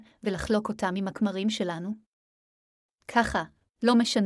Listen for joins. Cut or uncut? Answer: uncut